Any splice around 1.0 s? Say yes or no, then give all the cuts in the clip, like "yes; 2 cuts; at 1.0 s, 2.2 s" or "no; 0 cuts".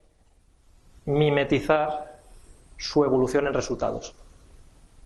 no; 0 cuts